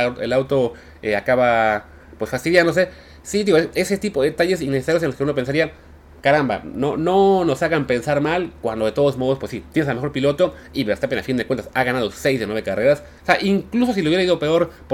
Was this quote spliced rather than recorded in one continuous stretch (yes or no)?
yes